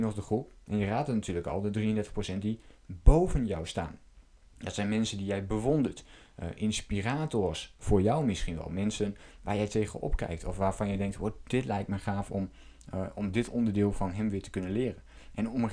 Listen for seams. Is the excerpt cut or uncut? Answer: uncut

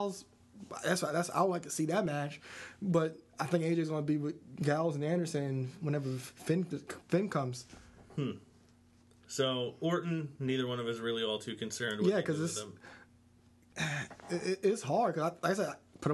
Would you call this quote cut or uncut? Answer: uncut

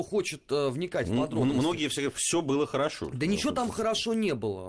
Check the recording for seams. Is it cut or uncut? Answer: uncut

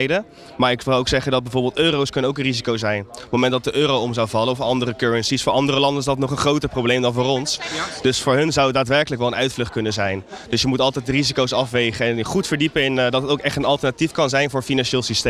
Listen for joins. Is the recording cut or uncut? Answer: uncut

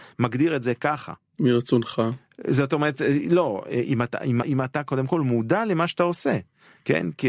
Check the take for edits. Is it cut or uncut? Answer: cut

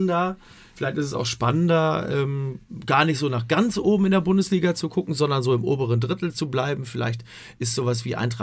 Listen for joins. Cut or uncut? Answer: uncut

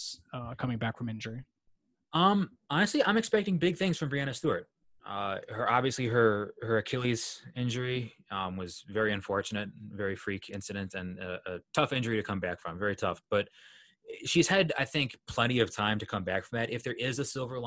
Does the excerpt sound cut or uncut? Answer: uncut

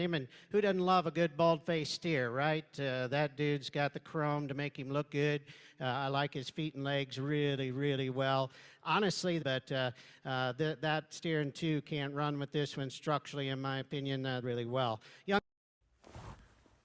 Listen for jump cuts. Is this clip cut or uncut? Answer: cut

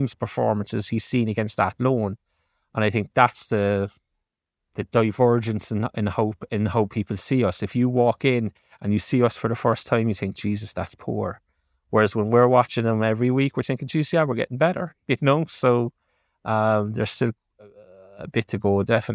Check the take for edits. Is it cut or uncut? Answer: uncut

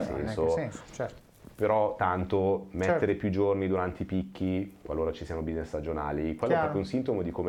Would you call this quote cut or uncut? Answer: uncut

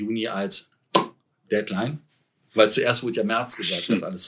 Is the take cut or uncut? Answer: uncut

